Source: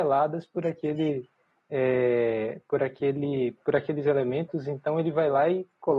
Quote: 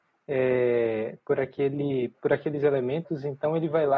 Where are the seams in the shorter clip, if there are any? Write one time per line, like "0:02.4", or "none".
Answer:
none